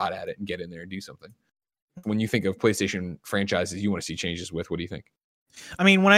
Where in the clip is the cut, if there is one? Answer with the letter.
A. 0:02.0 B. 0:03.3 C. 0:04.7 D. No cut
A